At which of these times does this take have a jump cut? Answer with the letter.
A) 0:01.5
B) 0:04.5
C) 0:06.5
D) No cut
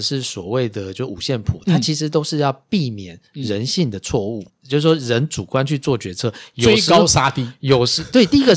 B